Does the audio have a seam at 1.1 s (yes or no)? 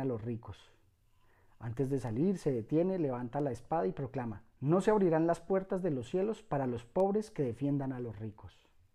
no